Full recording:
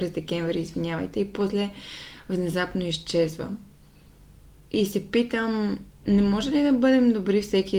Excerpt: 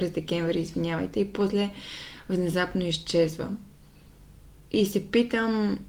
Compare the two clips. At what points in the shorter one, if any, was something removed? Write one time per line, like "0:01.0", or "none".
none